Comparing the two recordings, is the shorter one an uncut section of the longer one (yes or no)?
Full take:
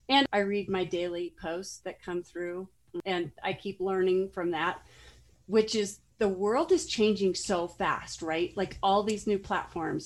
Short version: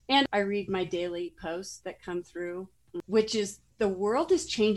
no